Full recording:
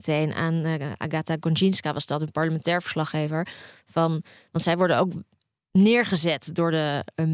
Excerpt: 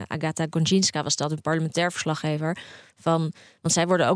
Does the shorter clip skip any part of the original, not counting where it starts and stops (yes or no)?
no